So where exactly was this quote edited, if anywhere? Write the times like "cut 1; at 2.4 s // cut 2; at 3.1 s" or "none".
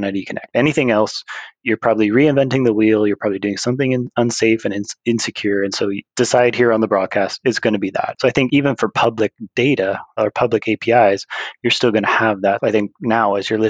cut 1; at 8.1 s // cut 2; at 12.6 s

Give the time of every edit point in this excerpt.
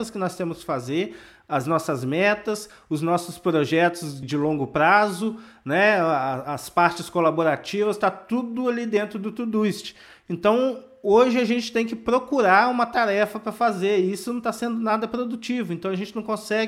cut 1; at 4.2 s

